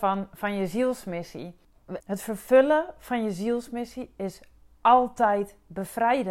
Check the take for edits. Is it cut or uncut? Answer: cut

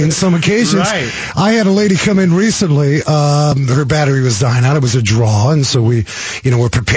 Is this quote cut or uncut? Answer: uncut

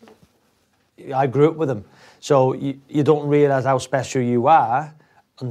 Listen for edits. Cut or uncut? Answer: uncut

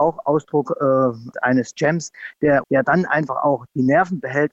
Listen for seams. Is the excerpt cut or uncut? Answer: cut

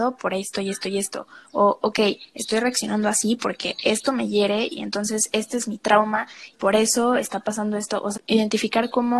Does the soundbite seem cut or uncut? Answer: cut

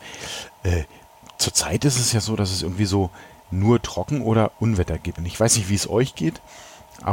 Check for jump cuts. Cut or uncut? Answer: cut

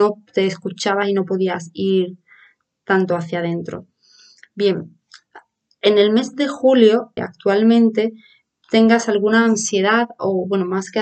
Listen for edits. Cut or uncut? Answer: cut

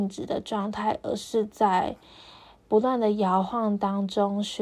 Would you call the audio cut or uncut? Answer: uncut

